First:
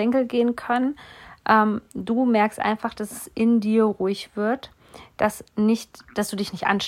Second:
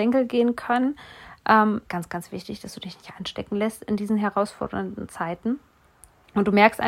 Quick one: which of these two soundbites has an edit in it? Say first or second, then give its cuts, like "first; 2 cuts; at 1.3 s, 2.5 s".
second; 1 cut; at 1.8 s